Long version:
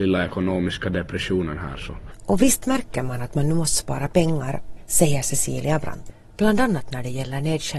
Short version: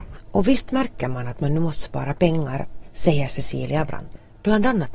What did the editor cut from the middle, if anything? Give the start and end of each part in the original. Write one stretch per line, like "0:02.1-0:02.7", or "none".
none